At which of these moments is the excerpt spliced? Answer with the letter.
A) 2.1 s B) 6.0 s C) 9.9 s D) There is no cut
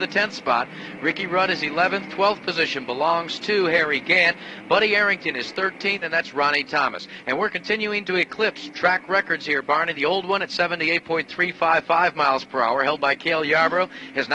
B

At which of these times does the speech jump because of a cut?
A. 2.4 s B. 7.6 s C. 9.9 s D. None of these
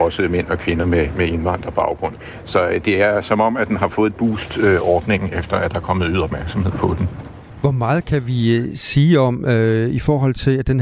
D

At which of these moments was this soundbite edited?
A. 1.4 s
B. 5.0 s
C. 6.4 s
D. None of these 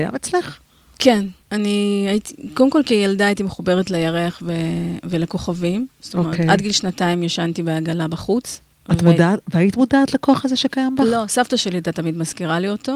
A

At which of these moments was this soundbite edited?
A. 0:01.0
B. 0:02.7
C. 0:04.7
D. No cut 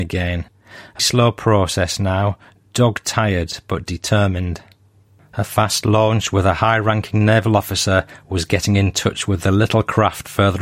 A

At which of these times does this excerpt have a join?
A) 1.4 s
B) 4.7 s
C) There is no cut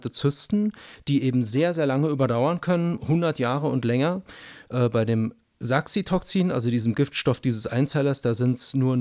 B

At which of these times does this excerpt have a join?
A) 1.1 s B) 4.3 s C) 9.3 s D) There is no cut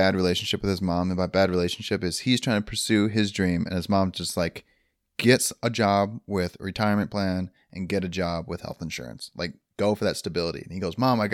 D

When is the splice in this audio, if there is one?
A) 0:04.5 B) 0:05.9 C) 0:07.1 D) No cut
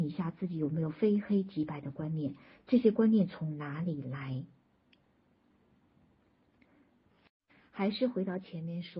D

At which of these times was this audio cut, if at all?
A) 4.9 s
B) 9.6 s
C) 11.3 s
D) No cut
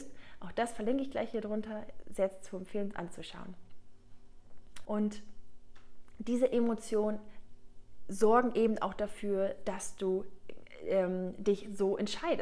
A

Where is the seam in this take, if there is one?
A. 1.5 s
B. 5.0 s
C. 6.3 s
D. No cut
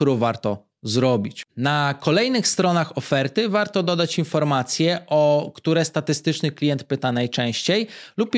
A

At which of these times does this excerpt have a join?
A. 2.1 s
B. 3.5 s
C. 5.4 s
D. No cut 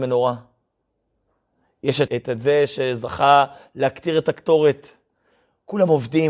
A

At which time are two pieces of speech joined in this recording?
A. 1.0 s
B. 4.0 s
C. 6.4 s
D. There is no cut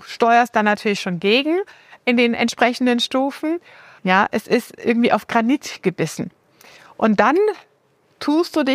B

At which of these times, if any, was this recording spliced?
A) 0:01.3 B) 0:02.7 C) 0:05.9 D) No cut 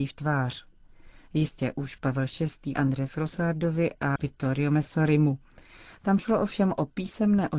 B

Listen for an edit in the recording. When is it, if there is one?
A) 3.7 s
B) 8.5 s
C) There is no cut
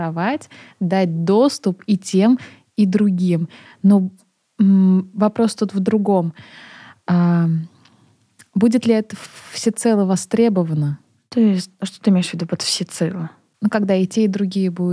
C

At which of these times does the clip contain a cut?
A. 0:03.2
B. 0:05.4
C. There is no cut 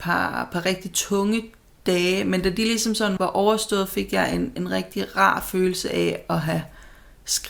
A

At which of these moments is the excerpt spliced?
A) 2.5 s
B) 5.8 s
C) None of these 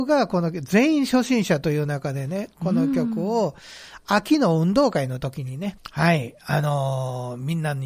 B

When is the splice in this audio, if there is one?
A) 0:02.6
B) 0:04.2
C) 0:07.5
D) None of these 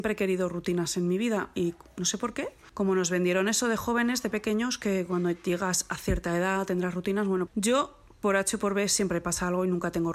C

